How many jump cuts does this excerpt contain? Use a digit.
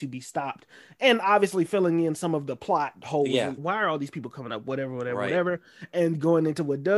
1